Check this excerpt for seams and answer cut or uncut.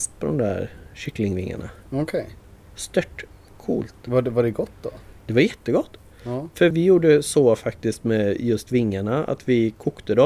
cut